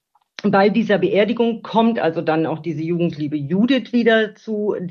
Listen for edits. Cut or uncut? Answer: uncut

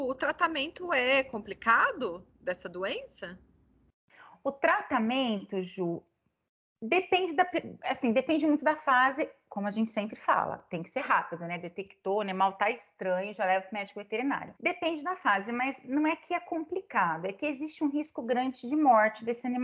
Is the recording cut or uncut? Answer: cut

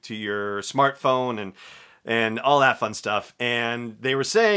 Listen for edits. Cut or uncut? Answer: uncut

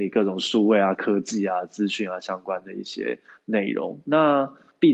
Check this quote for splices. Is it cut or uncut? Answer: uncut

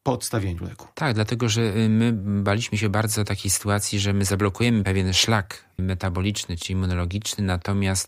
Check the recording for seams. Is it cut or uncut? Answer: uncut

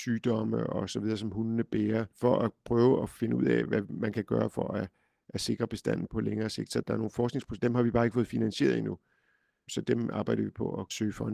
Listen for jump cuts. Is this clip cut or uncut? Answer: uncut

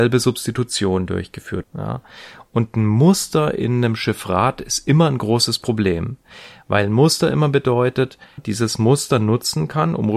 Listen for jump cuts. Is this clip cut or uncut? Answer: cut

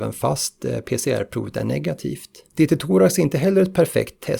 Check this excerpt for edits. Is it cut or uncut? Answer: cut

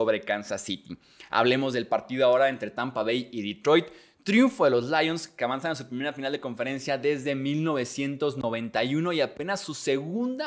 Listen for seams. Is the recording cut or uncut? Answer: uncut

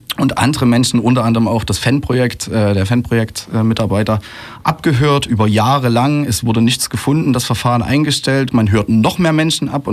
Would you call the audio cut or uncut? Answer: cut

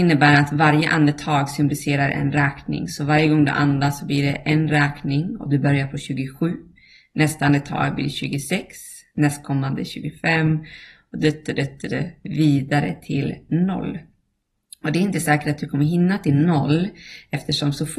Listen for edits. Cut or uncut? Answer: uncut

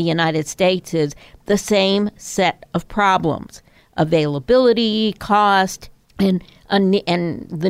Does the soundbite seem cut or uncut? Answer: cut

